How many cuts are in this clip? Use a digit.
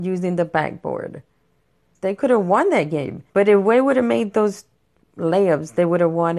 2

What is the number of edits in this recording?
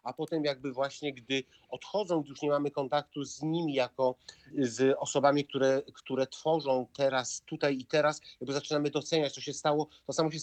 1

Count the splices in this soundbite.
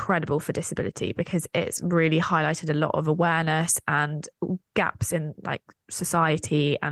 0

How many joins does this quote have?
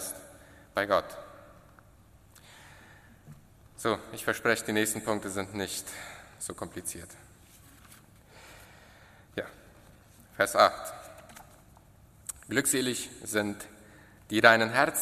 0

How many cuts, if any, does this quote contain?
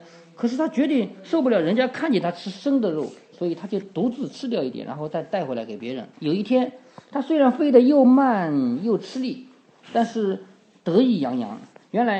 1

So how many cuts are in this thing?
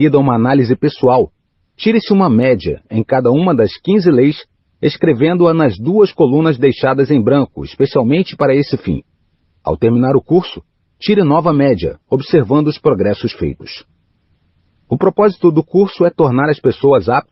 1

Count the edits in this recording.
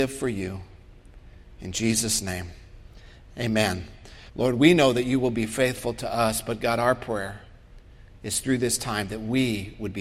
1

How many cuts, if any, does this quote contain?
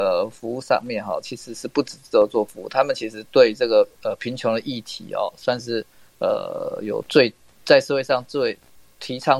0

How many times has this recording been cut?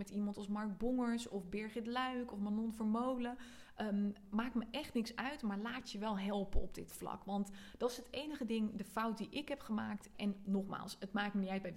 2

